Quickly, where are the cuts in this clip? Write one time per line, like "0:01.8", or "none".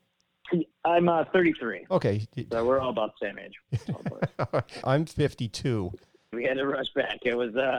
0:04.8
0:06.3